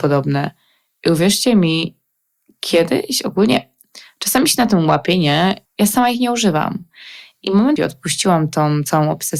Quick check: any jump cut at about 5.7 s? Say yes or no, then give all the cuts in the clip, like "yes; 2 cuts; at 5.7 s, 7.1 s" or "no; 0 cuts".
yes; 2 cuts; at 5.7 s, 7.8 s